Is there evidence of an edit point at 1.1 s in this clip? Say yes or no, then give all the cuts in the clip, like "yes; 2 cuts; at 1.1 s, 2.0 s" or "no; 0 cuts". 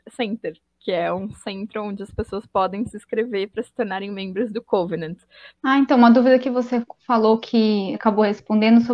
no; 2 cuts; at 5.5 s, 7.9 s